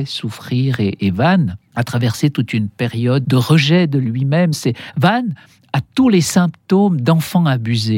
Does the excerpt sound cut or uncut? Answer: cut